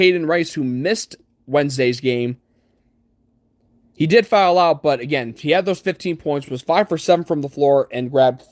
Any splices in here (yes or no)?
no